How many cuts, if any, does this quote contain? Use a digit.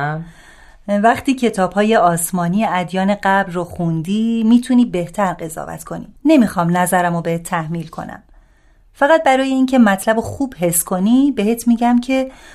1